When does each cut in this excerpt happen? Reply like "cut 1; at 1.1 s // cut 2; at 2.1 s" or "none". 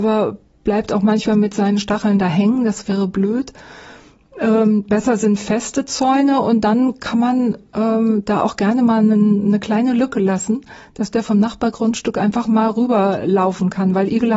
none